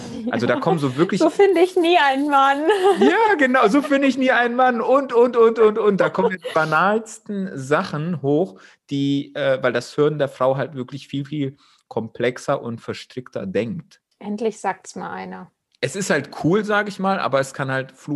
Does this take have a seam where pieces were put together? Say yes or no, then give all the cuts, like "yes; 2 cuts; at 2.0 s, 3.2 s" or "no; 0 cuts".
yes; 1 cut; at 14.1 s